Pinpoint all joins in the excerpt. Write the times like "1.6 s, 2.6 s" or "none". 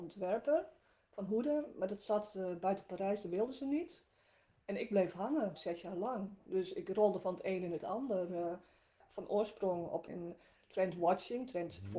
5.6 s, 10.1 s